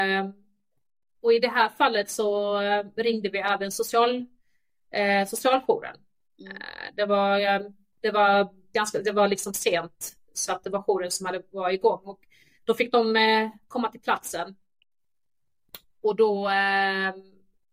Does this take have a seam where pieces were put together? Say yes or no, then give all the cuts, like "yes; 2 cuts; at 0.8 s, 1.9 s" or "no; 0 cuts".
no; 0 cuts